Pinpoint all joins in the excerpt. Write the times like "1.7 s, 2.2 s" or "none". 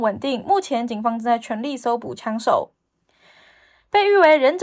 none

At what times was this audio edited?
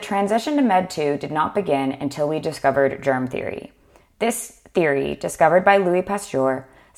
none

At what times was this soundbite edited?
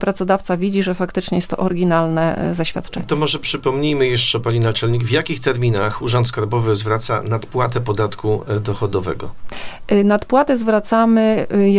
none

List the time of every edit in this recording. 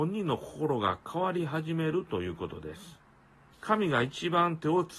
3.5 s

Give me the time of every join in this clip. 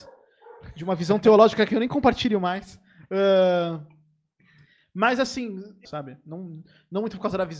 5.9 s

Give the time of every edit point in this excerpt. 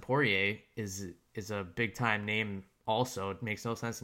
none

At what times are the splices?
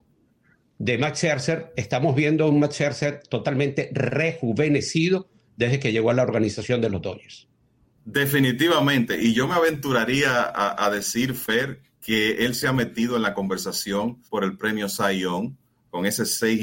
14.2 s

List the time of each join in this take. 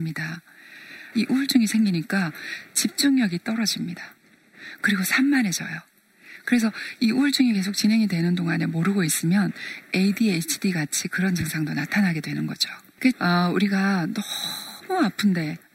1.1 s, 13.1 s

